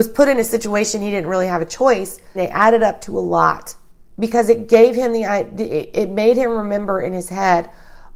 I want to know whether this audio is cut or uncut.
cut